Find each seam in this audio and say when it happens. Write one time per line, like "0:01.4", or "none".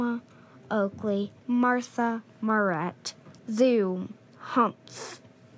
0:01.4
0:03.4